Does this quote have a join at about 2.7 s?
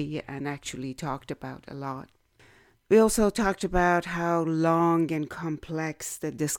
yes; 1 cut; at 2.7 s

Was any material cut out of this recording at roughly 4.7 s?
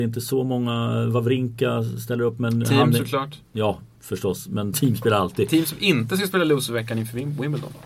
yes; 1 cut; at 4.7 s

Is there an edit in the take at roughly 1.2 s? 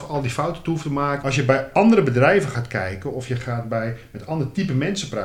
yes; 1 cut; at 1.2 s

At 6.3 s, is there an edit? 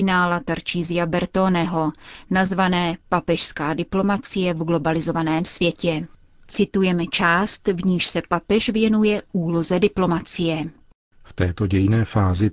no; 0 cuts

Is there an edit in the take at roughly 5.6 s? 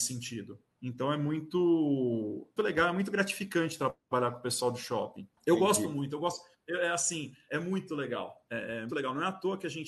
no; 3 cuts; at 2.6 s, 7.5 s, 8.9 s

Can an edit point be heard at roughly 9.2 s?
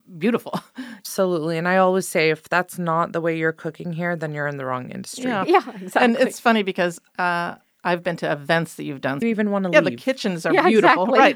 yes; 1 cut; at 9.2 s

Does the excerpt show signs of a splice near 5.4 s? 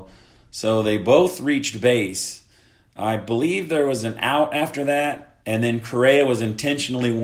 yes; 1 cut; at 5.4 s

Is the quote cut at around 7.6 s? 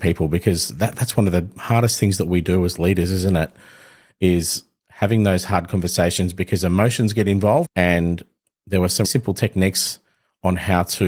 yes; 2 cuts; at 7.6 s, 9.0 s

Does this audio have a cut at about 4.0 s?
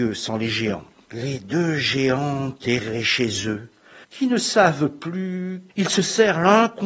yes; 3 cuts; at 1.0 s, 4.0 s, 5.7 s

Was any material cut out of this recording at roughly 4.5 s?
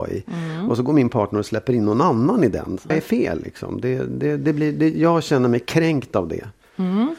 no; 1 cut; at 2.9 s

